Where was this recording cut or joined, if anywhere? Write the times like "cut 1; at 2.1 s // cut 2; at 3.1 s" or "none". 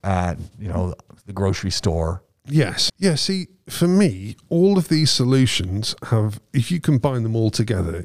cut 1; at 2.9 s